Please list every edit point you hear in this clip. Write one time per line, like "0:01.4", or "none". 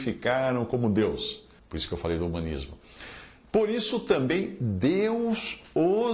0:01.6